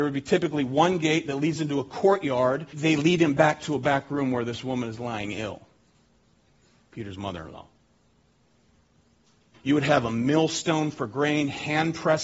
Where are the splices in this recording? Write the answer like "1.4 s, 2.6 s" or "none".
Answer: 2.7 s, 9.5 s